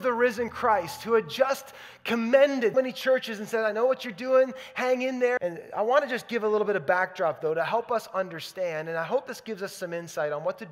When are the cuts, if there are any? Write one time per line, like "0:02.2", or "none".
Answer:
0:02.7
0:05.4